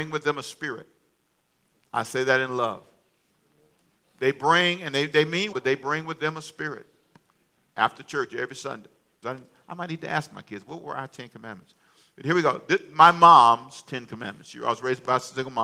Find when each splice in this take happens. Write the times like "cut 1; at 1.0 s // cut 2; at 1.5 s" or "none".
cut 1; at 5.5 s // cut 2; at 9.2 s

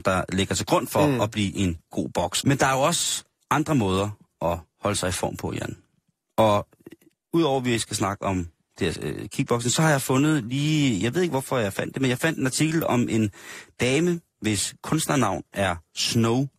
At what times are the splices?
cut 1; at 2.4 s

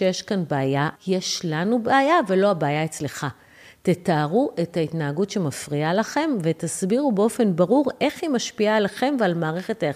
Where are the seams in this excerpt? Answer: cut 1; at 1.0 s

